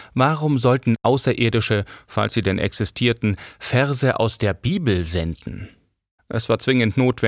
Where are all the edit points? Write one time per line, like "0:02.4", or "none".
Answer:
0:06.2

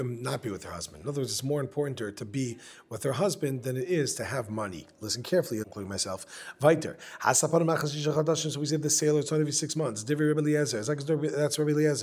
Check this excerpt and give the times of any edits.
0:05.6

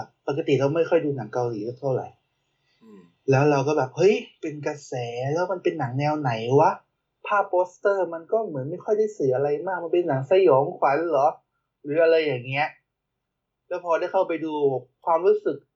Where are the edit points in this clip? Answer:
none

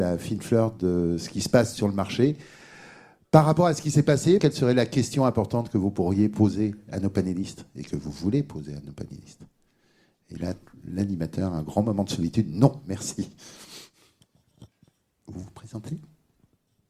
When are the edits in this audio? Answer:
0:04.4

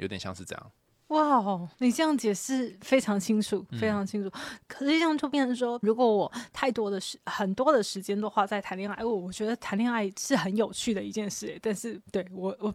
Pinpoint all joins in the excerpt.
0:01.7

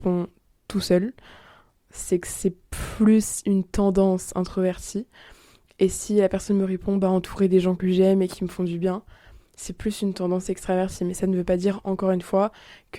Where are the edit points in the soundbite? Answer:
none

